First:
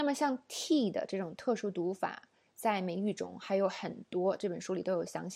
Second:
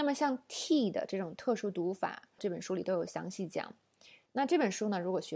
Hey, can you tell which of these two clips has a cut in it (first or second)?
second